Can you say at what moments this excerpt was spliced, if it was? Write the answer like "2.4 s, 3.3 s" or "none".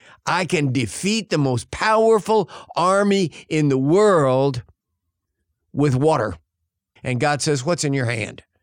7.0 s